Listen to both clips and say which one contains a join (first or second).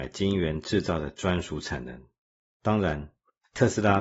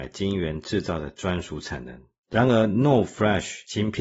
second